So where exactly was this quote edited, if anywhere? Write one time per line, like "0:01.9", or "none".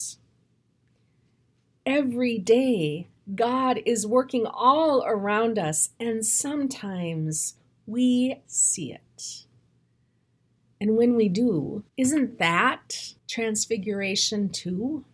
0:08.4
0:11.9
0:13.2